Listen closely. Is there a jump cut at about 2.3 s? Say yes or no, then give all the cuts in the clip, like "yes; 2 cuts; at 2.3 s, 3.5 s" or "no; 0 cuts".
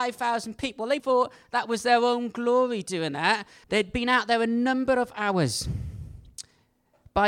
no; 2 cuts; at 1.0 s, 3.6 s